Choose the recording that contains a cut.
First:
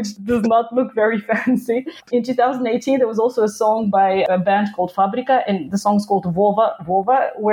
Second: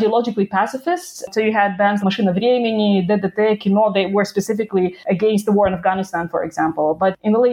second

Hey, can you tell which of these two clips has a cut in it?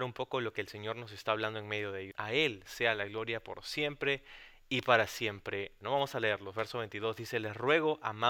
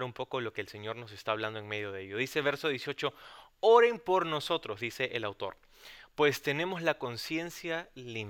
first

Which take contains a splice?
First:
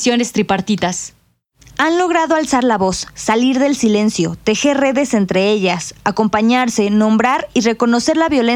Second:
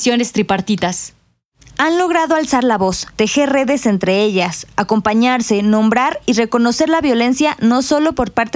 second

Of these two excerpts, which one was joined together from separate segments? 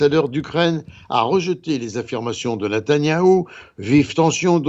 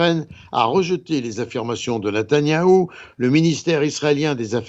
second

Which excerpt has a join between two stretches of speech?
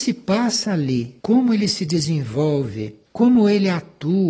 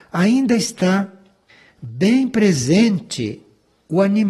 first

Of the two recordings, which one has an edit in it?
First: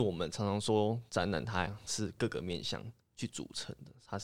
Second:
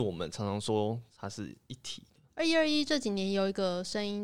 second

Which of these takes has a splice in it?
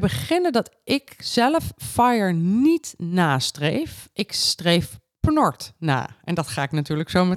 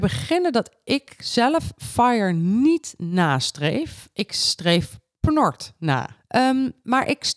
second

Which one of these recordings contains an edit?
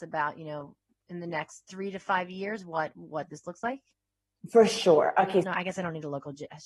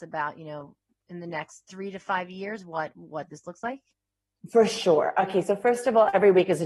first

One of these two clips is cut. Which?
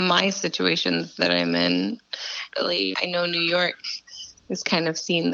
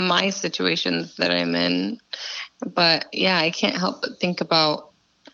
first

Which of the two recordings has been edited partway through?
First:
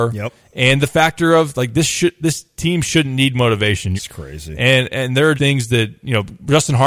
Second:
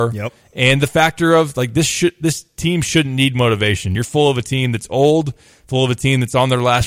first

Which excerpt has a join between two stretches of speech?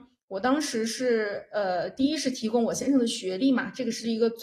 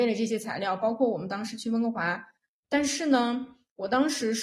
second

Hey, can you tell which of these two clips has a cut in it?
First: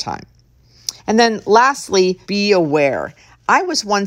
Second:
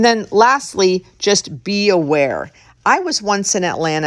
first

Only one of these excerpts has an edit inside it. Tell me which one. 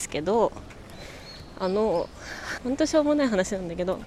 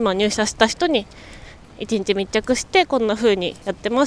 first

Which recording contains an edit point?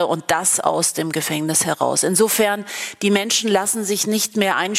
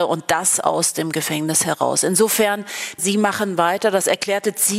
second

